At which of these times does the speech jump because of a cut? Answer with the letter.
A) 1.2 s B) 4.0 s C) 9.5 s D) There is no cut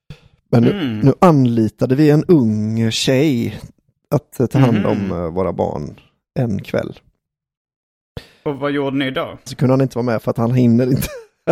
C